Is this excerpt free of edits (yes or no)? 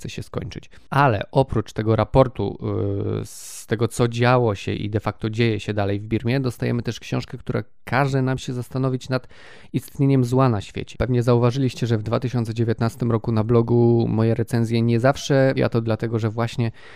no